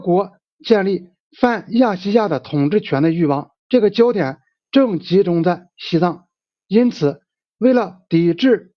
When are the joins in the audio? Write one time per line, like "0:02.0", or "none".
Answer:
0:03.6